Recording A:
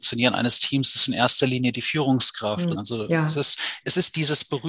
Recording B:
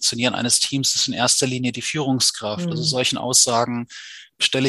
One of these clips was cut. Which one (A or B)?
A